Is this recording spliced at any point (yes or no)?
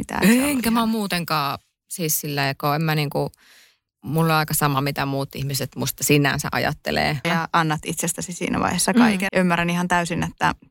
yes